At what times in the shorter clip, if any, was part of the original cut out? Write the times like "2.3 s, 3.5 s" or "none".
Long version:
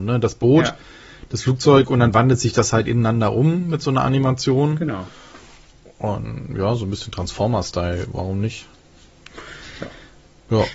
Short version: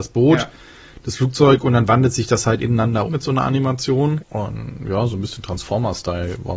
3.1 s, 4.2 s

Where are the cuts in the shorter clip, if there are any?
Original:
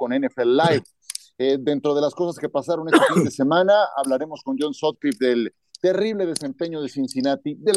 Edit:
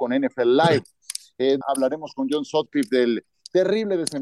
1.6 s

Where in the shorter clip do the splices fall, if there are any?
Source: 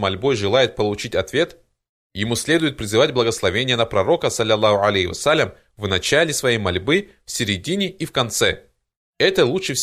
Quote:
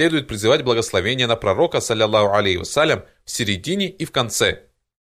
3.2 s

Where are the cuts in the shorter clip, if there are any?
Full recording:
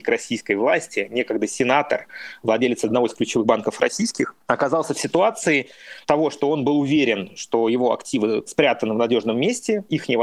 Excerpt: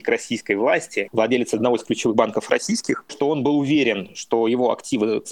1.1 s, 3.1 s

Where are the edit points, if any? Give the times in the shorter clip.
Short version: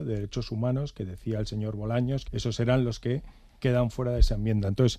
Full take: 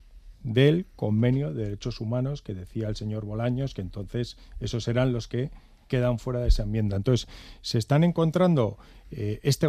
2.3 s

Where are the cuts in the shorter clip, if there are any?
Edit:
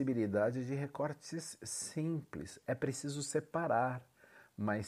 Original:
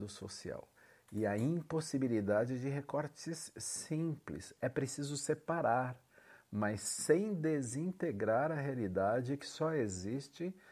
none

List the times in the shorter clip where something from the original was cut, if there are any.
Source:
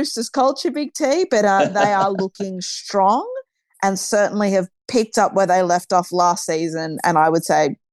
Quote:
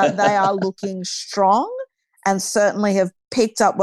none

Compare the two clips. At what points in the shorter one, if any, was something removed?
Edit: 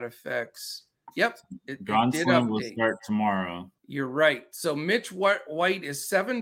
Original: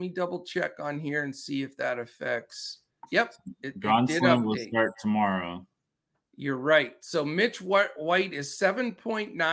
3.8 s

